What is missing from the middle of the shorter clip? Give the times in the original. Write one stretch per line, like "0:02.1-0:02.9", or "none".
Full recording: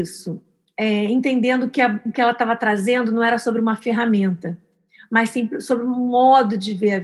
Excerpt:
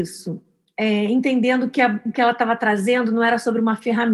none